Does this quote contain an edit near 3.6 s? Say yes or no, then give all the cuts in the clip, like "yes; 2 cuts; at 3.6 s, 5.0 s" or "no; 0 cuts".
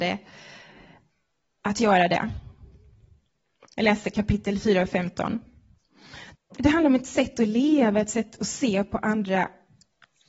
no; 1 cut; at 6.4 s